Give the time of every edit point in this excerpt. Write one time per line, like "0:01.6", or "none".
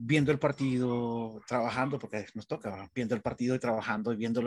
none